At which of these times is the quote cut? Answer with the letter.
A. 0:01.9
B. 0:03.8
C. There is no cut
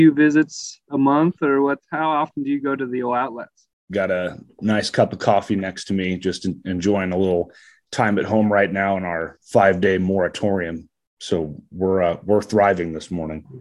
B